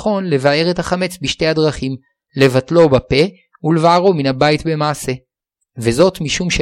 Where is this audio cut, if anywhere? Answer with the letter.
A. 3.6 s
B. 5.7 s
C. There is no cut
C